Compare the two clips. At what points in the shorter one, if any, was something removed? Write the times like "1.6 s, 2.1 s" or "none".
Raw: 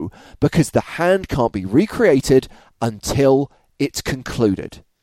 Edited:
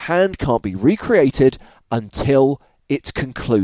none